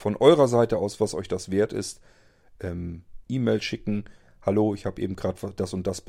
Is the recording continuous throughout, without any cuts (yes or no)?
no